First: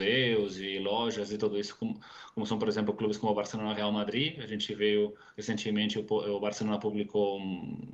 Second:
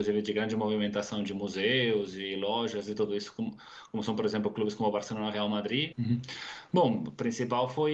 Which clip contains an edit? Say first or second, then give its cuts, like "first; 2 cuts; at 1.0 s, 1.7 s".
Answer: second; 1 cut; at 5.9 s